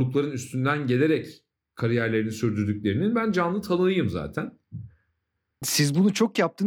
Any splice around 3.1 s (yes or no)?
no